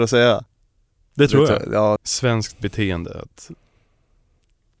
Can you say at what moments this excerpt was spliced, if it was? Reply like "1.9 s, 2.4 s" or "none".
2.0 s